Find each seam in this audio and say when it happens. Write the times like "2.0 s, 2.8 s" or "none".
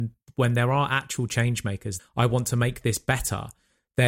2.0 s